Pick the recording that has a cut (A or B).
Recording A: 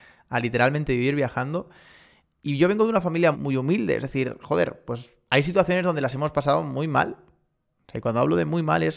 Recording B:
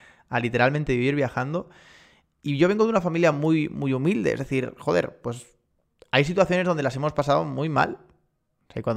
A